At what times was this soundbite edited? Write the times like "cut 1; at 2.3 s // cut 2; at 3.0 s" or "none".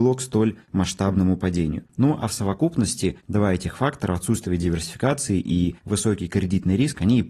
none